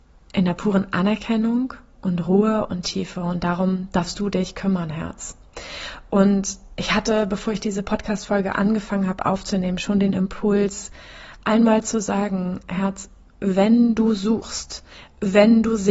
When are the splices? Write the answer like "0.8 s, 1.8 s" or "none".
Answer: none